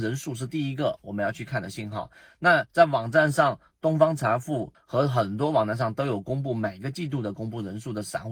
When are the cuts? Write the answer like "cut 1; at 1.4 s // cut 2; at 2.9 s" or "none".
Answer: cut 1; at 4.7 s